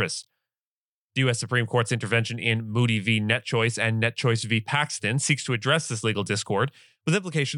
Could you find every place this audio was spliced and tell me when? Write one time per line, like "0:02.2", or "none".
none